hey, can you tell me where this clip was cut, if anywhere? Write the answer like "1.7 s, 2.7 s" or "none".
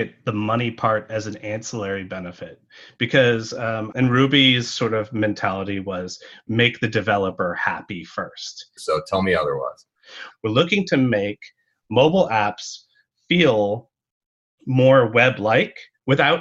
3.9 s, 8.8 s, 10.3 s